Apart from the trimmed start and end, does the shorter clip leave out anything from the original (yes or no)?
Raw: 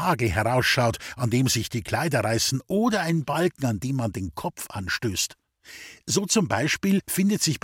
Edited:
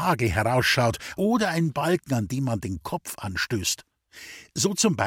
yes